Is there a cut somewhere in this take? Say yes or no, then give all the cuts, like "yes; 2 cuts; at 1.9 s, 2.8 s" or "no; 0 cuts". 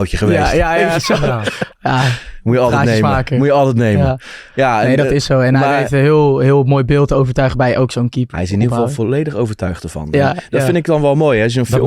yes; 1 cut; at 8.3 s